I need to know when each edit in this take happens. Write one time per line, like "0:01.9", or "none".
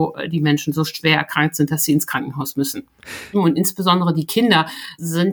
0:03.3